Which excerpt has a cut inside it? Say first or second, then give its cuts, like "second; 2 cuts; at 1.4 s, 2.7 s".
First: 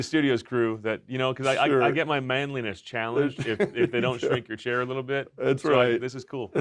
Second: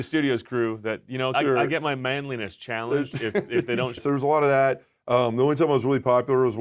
second; 2 cuts; at 1.3 s, 4.0 s